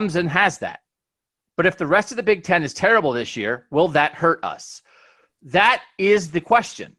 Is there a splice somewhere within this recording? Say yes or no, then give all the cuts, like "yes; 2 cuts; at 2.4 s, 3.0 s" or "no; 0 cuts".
no; 0 cuts